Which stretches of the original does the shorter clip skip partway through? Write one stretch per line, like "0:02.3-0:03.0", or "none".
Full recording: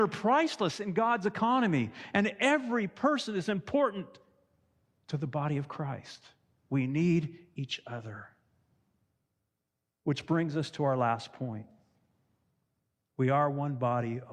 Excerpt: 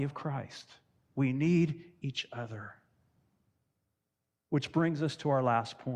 none